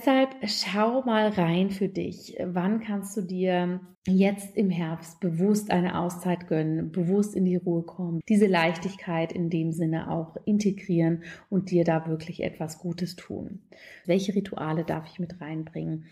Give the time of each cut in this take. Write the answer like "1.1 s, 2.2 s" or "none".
3.9 s, 8.2 s, 14.0 s